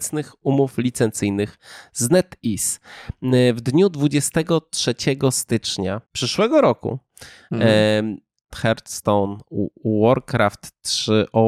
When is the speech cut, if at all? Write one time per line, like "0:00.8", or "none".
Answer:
0:06.0
0:08.5